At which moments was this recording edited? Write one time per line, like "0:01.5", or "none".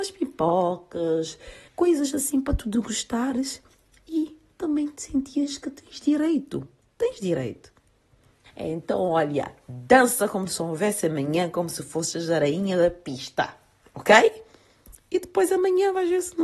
0:01.7
0:08.5